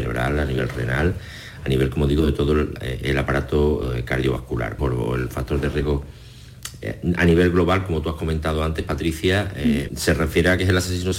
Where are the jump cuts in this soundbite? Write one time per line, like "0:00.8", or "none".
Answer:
0:04.8
0:09.9